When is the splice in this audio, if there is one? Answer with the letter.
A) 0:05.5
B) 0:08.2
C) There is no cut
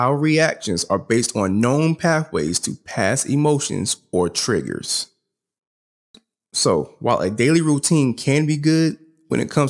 C